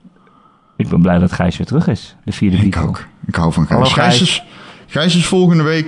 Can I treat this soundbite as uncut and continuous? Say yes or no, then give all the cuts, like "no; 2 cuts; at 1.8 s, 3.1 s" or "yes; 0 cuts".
yes; 0 cuts